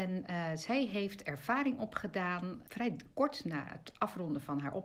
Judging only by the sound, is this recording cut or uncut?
cut